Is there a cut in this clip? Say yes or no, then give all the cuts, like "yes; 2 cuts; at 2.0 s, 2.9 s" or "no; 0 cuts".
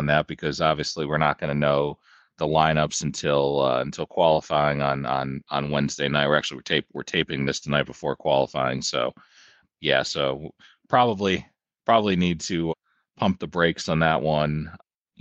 no; 0 cuts